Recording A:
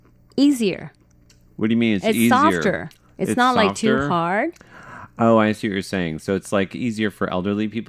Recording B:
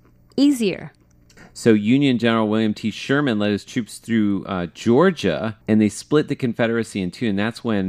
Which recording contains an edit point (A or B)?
B